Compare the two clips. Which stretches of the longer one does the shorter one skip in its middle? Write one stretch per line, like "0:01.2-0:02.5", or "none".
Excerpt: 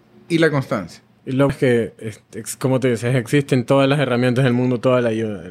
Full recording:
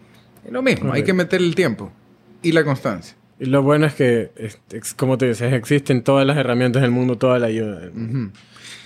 0:03.6-0:03.9